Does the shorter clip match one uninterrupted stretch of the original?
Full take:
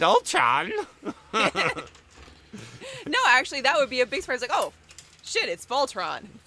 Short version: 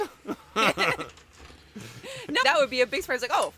no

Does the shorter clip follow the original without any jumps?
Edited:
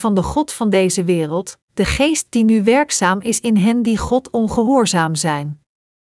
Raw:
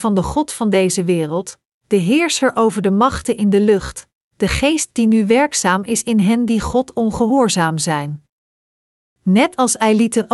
no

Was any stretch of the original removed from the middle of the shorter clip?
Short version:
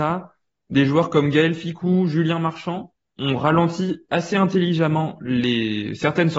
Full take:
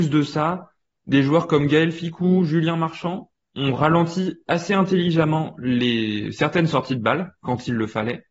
no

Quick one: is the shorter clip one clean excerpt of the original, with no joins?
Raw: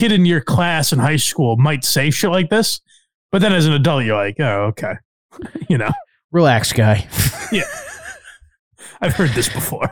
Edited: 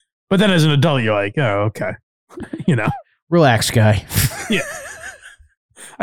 yes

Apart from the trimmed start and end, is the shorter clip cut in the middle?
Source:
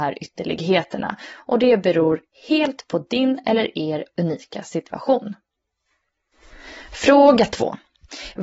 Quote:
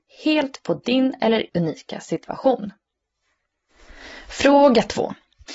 yes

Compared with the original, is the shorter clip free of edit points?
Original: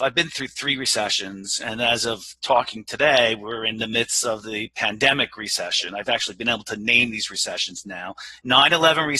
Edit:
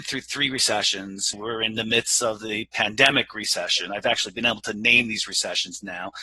no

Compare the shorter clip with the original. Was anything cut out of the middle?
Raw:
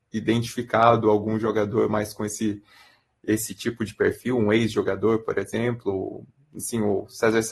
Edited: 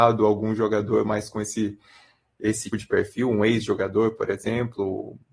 yes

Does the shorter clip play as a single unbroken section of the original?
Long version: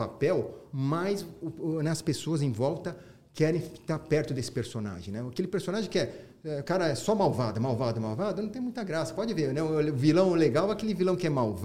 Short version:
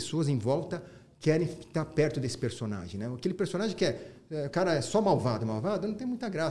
no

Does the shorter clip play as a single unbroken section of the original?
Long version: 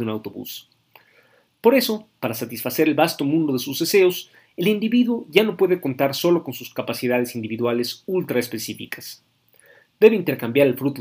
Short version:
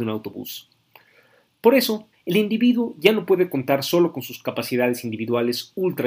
no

